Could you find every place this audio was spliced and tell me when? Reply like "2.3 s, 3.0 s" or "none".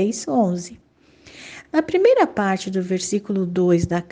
none